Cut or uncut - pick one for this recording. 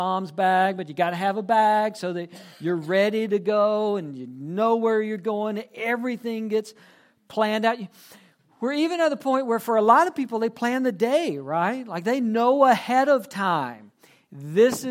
uncut